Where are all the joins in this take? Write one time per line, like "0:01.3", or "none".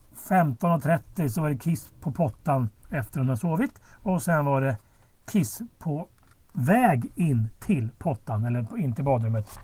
none